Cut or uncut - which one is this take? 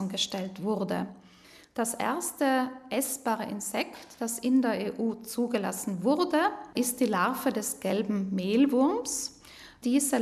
uncut